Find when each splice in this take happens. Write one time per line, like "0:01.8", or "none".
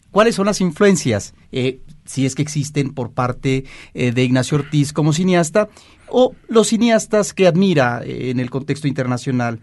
0:01.4